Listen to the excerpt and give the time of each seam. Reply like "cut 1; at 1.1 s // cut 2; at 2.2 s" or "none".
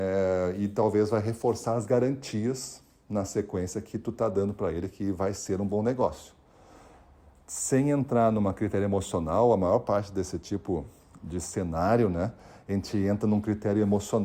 none